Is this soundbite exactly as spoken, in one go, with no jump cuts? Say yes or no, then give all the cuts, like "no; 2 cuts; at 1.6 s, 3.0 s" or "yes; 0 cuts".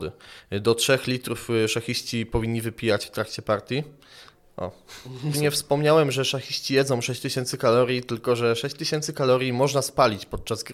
no; 1 cut; at 5.3 s